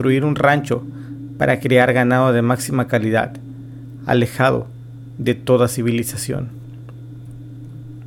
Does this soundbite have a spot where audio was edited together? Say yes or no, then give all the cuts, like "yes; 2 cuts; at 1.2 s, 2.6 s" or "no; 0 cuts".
no; 0 cuts